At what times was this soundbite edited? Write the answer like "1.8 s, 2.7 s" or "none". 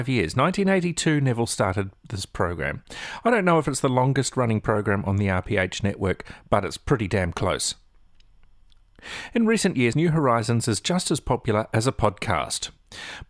9.9 s